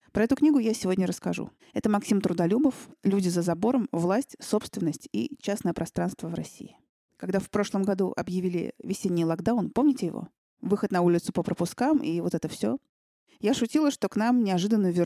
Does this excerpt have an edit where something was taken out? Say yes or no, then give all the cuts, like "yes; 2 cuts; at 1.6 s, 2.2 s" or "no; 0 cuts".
no; 0 cuts